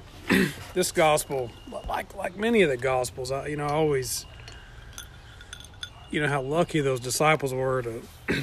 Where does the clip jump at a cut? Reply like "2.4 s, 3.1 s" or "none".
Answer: none